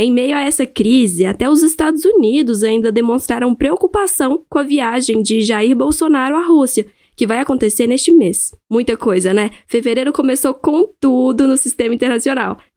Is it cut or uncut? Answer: cut